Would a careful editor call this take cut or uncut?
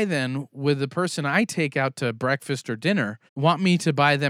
cut